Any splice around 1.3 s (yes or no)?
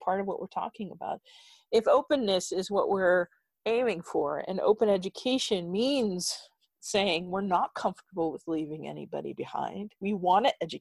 no